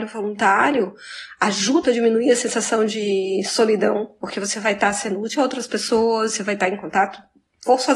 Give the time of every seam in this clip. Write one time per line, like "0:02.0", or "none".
0:01.8